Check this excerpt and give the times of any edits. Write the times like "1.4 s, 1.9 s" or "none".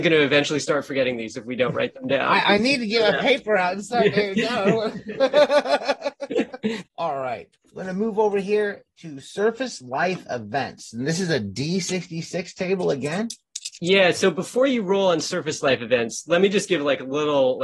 none